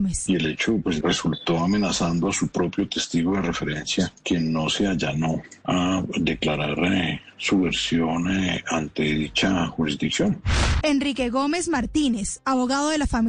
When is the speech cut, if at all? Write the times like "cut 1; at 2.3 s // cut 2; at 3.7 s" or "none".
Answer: cut 1; at 1.0 s // cut 2; at 10.8 s